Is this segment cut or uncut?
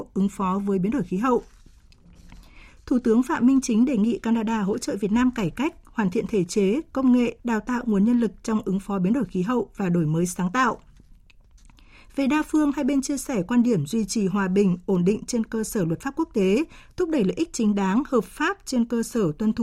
cut